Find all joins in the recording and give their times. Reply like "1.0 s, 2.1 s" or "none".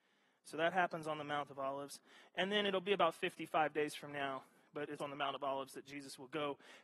5.0 s